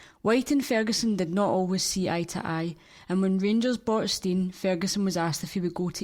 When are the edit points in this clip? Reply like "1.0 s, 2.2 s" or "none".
none